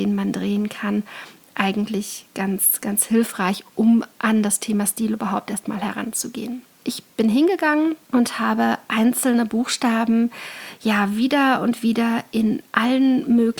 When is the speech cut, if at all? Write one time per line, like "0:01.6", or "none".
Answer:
0:06.8
0:08.0